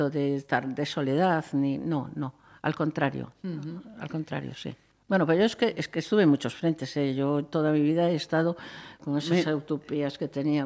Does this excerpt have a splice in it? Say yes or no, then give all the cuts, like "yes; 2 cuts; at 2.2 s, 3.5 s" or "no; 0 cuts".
yes; 1 cut; at 9.0 s